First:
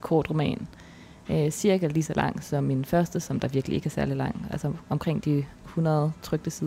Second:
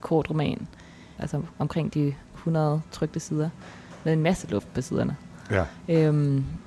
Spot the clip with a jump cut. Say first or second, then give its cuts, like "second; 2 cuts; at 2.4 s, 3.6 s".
second; 1 cut; at 1.2 s